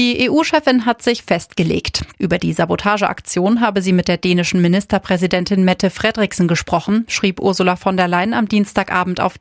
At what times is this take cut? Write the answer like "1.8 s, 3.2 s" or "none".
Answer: 2.1 s